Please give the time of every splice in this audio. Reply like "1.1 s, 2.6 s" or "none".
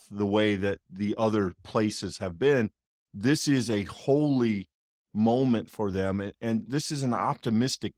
6.6 s

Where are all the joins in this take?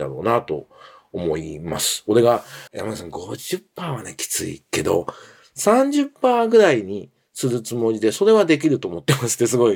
2.7 s

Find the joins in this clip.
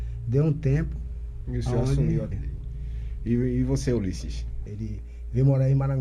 2.3 s, 4.7 s

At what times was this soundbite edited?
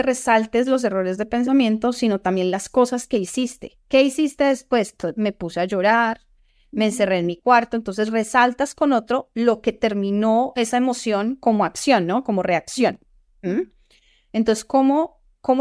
none

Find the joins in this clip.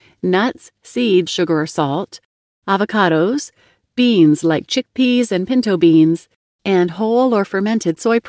1.3 s

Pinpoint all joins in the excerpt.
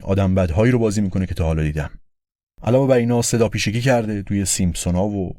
none

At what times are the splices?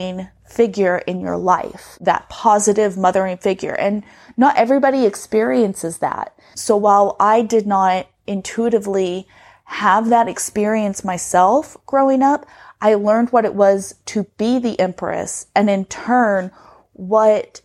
6.5 s

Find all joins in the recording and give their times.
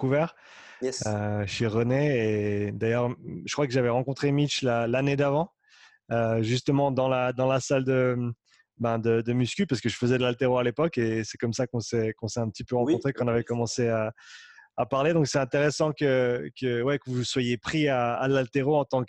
none

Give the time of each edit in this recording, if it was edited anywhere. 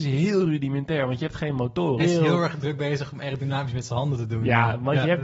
2.0 s

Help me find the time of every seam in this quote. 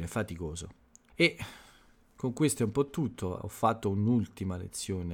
1.1 s, 3.4 s

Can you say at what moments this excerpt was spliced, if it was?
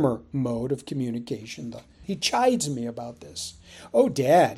2.0 s

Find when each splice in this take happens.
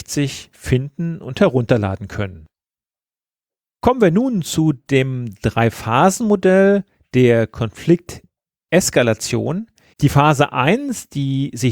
9.9 s

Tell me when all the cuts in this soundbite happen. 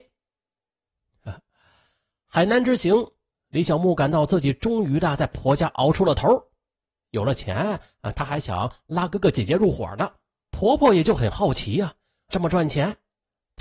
10.5 s, 12.3 s

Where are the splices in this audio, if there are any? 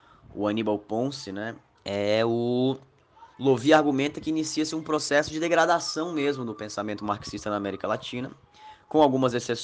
1.7 s, 3.3 s

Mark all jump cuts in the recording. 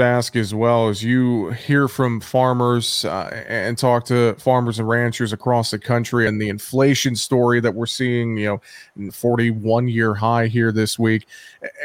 6.3 s, 9.1 s

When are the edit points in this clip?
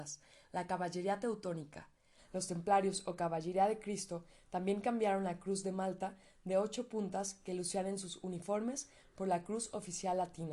2.2 s

